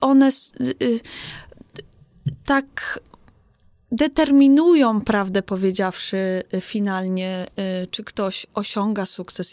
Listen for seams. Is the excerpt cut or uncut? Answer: uncut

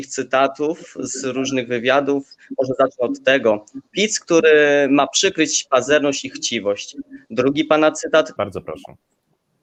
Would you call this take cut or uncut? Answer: cut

